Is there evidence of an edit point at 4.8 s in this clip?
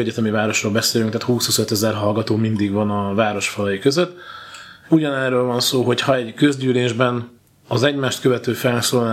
yes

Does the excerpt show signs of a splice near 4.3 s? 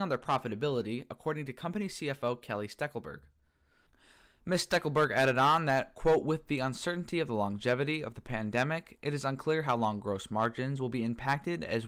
no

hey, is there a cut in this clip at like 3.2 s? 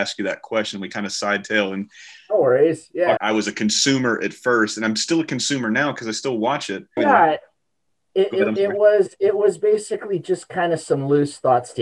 yes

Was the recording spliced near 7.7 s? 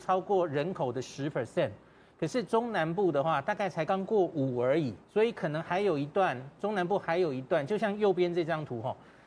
no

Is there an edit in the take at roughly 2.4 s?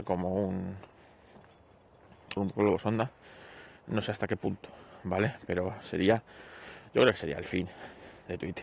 yes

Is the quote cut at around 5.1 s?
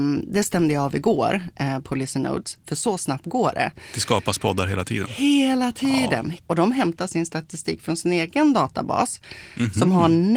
no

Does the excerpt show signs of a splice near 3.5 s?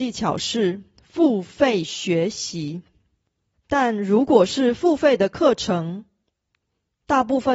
yes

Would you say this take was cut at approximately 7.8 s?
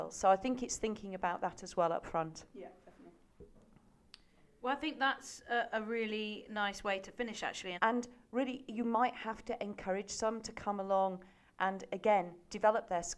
yes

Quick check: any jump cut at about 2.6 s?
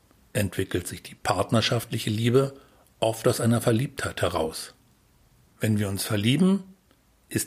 no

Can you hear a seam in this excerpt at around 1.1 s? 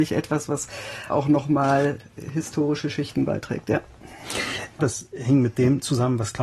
yes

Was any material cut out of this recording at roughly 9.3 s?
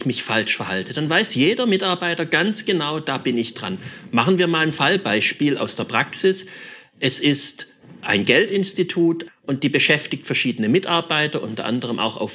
yes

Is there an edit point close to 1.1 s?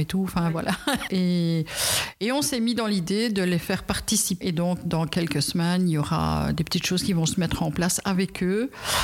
yes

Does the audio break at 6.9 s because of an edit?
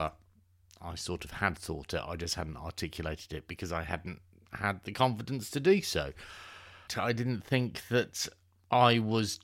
yes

